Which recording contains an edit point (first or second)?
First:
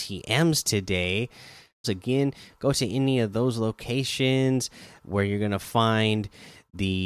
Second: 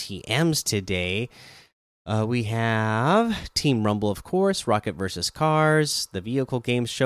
first